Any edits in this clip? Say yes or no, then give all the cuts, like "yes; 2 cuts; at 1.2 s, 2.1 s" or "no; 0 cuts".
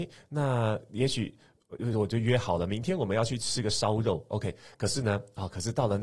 no; 0 cuts